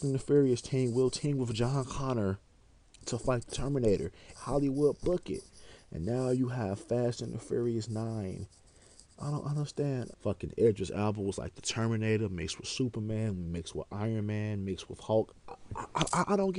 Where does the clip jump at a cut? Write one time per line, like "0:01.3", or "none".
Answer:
0:04.4
0:10.1